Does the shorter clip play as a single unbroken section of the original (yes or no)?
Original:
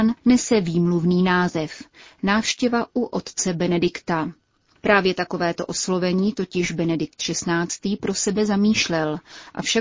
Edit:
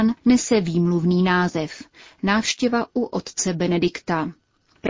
yes